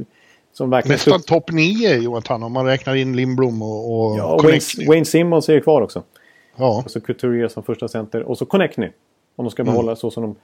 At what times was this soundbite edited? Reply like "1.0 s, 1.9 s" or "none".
6.9 s